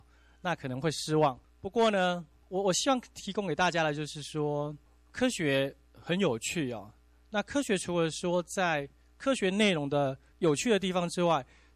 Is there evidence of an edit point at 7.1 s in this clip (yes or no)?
no